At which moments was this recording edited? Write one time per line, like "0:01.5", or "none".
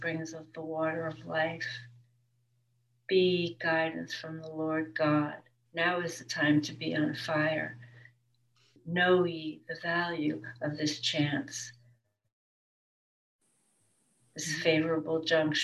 0:05.7